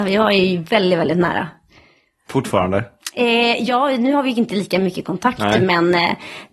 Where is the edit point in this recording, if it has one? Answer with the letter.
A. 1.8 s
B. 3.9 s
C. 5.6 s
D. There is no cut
D